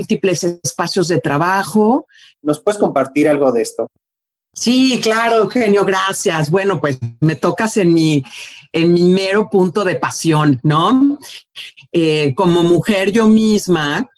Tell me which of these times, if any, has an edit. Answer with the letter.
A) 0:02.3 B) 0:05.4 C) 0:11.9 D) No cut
A